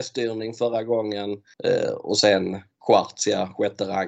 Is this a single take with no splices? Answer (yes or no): no